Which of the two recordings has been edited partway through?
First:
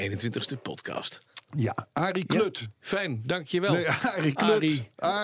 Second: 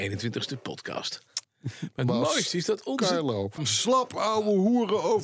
second; 2 cuts; at 1.4 s, 3.6 s

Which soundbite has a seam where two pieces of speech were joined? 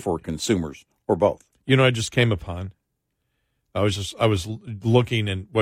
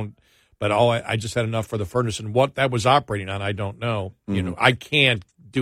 second; 1 cut; at 4.1 s

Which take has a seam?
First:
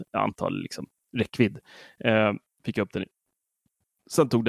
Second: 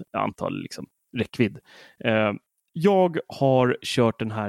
first; 1 cut; at 2.6 s

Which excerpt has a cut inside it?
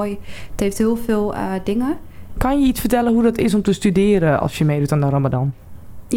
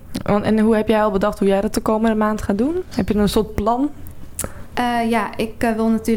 first; 1 cut; at 2.4 s

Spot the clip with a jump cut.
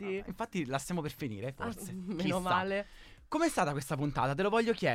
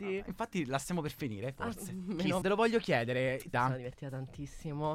second; 2 cuts; at 2.4 s, 3.5 s

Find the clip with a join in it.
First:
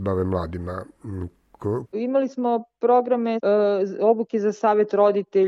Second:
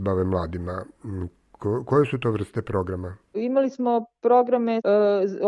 first; 1 cut; at 1.9 s

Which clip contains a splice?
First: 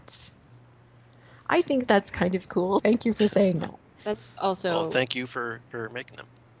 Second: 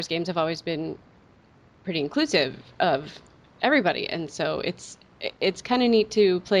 first; 1 cut; at 2.8 s

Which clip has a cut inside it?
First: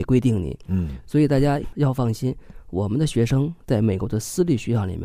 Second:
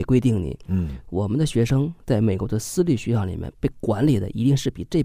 second; 1 cut; at 1.0 s

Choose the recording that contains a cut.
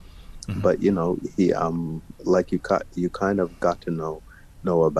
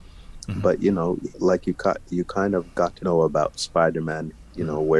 second; 2 cuts; at 1.3 s, 3.0 s

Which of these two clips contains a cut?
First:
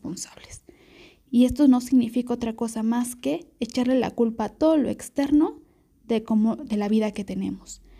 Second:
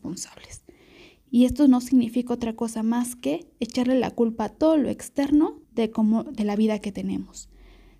second; 1 cut; at 5.6 s

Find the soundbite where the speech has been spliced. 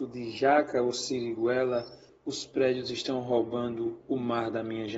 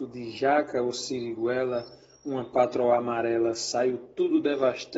first; 1 cut; at 2.1 s

